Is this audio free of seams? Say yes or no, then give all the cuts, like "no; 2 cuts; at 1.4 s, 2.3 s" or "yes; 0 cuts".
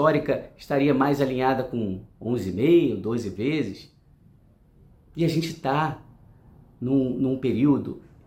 yes; 0 cuts